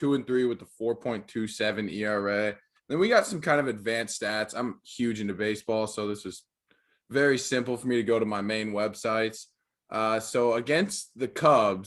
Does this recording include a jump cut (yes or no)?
no